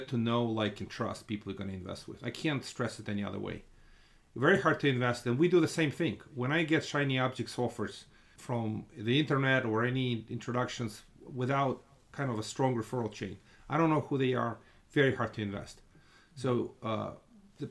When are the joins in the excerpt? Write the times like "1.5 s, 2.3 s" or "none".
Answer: 8.4 s